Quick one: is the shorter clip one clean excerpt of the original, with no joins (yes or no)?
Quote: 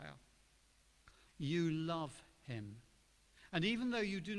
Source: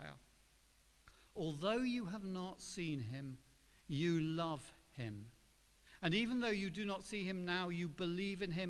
no